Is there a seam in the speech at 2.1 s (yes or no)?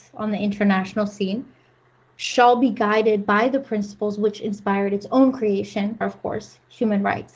no